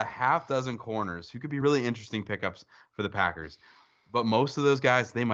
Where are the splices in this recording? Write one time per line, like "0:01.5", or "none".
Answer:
none